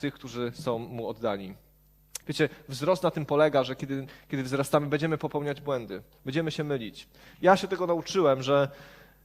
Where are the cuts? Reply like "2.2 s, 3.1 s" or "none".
2.2 s, 7.3 s